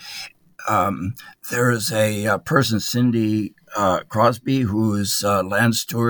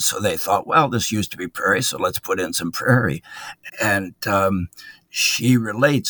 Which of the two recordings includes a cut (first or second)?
second